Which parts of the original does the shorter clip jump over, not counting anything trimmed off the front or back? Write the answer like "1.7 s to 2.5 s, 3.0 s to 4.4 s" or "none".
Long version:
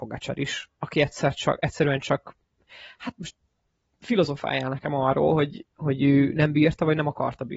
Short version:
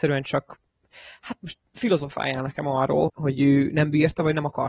3.4 s to 3.9 s, 5.3 s to 5.7 s